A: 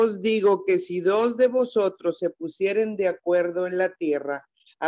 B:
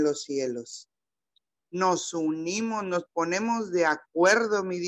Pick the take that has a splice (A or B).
B